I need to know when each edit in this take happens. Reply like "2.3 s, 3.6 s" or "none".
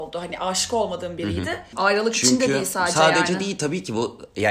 1.7 s